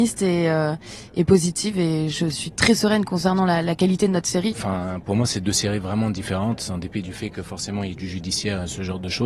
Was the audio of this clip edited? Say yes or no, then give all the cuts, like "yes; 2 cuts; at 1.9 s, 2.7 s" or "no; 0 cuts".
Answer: yes; 1 cut; at 4.5 s